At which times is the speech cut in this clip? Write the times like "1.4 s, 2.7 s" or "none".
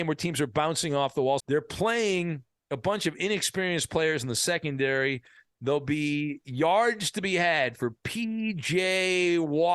1.4 s

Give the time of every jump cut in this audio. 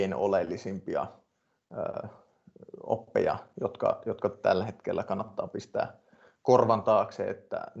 none

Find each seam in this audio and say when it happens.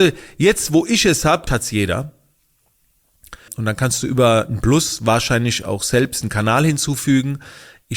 1.5 s, 3.5 s

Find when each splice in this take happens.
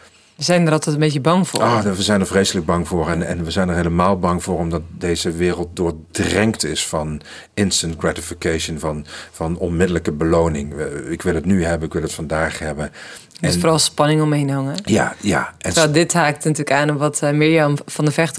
none

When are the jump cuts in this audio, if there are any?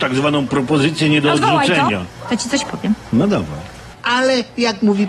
3.9 s

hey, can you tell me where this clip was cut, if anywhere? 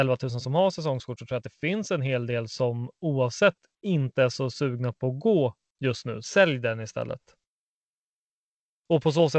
6.2 s

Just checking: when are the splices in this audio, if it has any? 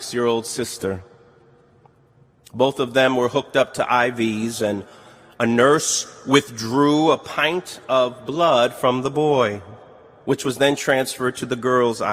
none

